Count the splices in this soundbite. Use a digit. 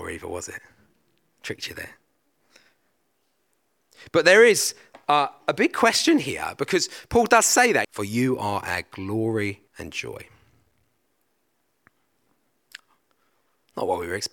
2